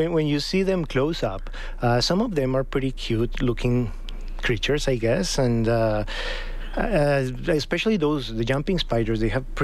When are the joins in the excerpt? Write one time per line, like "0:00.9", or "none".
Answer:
none